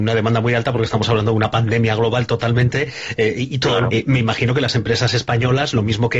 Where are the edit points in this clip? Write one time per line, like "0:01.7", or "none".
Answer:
0:03.9